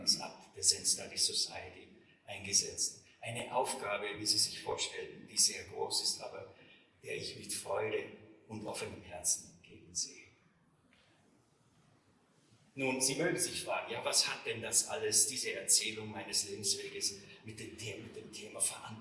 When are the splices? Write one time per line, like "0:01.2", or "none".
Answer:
none